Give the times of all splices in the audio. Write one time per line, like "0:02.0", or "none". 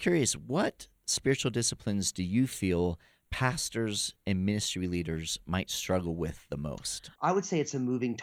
0:07.1